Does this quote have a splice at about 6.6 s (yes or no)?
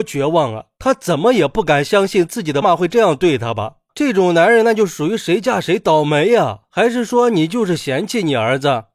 no